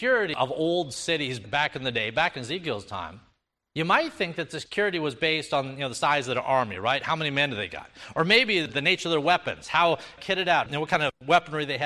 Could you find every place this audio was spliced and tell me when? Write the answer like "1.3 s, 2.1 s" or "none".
none